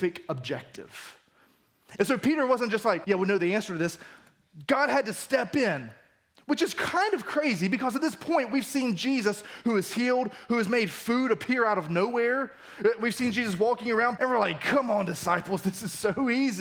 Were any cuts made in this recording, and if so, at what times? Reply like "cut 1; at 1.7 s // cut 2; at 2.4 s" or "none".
cut 1; at 2.0 s // cut 2; at 3.0 s // cut 3; at 14.2 s